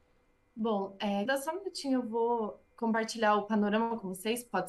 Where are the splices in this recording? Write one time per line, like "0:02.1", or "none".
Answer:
0:01.3
0:02.7